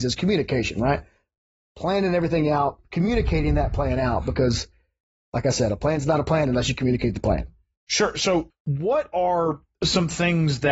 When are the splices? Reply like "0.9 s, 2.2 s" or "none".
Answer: 2.8 s, 8.5 s

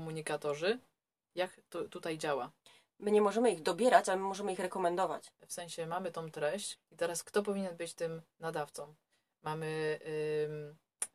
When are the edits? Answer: 5.3 s, 6.8 s

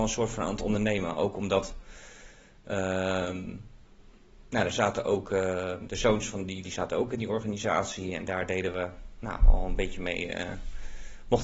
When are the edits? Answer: 6.6 s

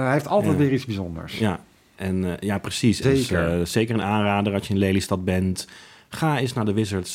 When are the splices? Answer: 3.0 s

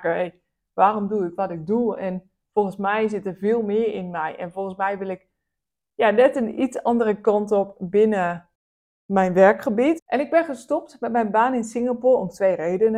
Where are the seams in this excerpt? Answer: 10.0 s

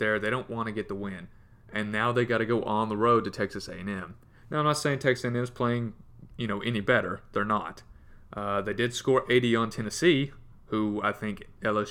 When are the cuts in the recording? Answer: none

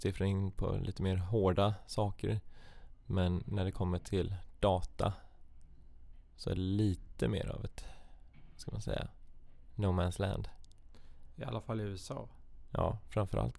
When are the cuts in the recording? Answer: none

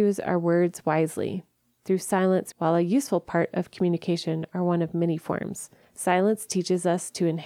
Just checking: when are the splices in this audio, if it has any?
2.5 s, 5.8 s

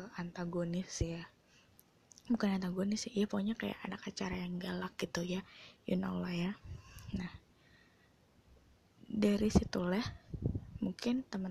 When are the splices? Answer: none

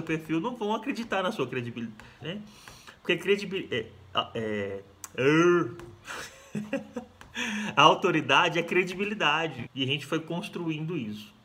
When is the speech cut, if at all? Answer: 2.2 s, 9.6 s

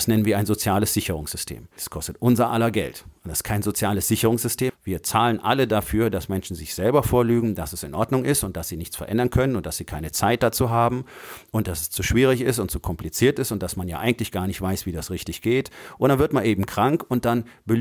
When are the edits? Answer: 1.8 s, 4.7 s

